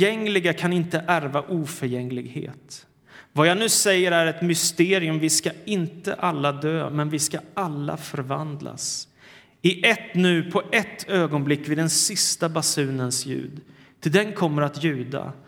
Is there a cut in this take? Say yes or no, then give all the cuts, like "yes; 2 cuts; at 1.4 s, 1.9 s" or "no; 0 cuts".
no; 0 cuts